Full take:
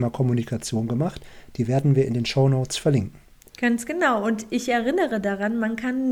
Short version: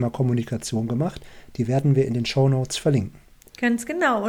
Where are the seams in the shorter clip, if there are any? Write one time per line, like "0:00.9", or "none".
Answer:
none